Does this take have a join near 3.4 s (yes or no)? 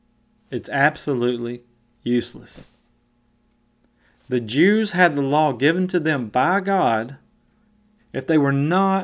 no